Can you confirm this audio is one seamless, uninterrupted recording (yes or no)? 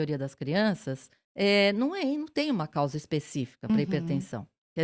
yes